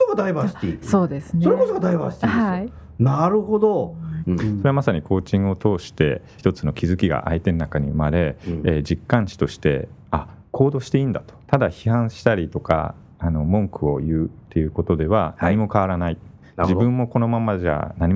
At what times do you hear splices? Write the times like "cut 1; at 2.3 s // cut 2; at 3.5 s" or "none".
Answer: cut 1; at 4.2 s // cut 2; at 6.4 s // cut 3; at 11.5 s